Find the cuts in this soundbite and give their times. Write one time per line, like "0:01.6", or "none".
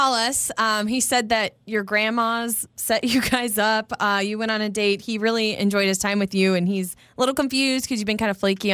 none